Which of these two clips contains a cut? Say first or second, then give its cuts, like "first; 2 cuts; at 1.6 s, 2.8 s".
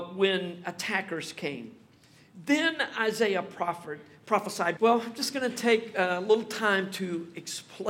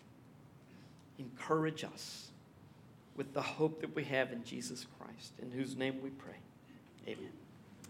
first; 1 cut; at 4.8 s